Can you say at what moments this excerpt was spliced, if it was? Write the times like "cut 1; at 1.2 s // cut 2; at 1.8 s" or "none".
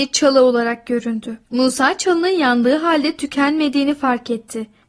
cut 1; at 1.4 s